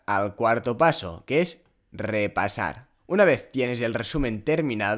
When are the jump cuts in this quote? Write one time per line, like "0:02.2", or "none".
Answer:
0:03.0